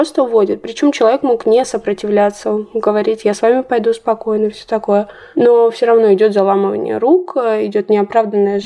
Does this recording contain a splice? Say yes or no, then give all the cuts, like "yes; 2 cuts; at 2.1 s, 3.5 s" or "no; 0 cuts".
no; 0 cuts